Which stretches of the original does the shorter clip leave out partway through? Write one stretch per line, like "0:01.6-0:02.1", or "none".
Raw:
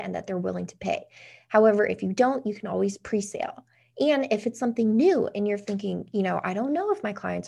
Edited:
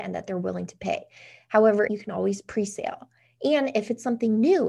0:01.9-0:02.4